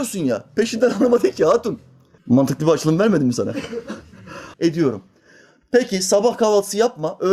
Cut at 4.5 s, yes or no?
yes